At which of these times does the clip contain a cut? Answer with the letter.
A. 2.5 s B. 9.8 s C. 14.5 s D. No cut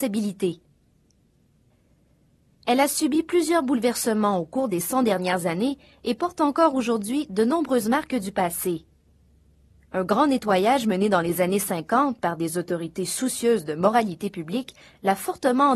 A